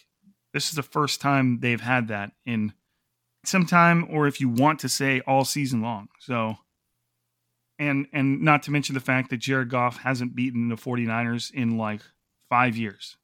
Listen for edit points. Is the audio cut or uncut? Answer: cut